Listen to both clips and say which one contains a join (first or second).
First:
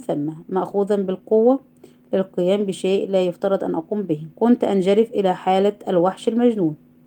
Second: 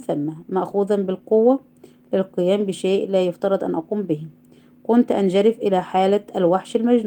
first